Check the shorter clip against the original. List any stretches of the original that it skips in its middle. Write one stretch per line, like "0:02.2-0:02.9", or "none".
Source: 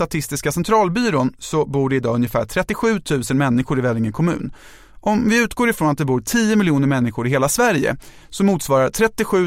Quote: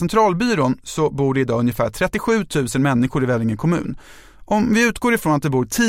none